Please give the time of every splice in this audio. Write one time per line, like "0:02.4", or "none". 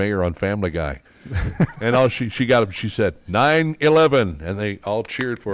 none